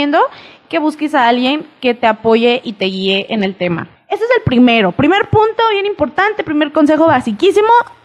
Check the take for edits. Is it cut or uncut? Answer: cut